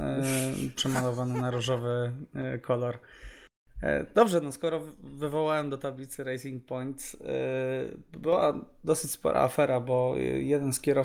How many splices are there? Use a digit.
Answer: 0